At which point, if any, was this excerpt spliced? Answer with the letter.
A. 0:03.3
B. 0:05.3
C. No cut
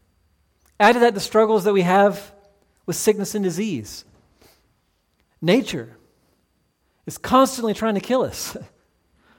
B